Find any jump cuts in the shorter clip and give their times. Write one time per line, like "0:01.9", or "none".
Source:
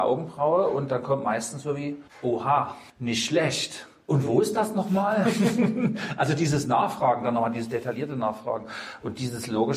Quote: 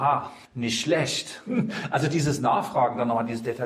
0:01.5